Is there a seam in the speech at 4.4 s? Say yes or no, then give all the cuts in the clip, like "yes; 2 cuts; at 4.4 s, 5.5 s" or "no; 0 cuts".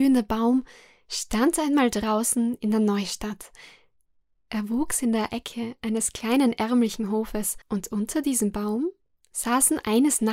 no; 1 cut; at 7.6 s